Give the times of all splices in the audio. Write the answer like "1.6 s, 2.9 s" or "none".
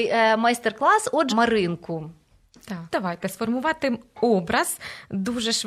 1.3 s, 2.9 s